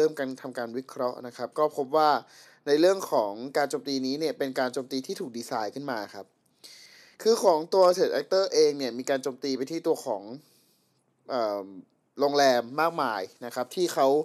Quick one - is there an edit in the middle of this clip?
no; 0 cuts

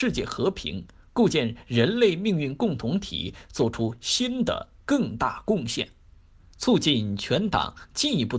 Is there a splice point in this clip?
yes; 1 cut; at 6.4 s

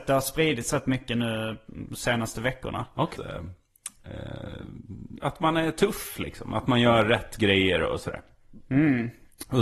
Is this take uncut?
no; 1 cut; at 3.2 s

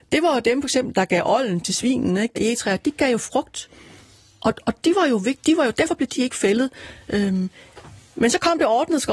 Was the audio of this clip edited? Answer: yes; 1 cut; at 2.3 s

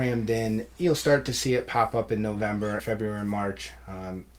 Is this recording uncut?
no; 1 cut; at 2.8 s

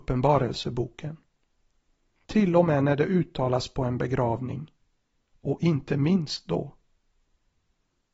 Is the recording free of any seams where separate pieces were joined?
no; 1 cut; at 2.3 s

